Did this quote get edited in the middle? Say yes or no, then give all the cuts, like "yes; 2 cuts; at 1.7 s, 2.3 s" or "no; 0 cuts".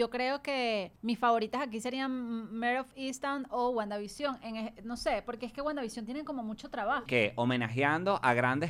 yes; 2 cuts; at 1.0 s, 7.1 s